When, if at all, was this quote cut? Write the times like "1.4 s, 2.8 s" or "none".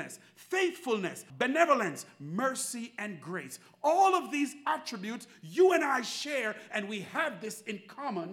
1.3 s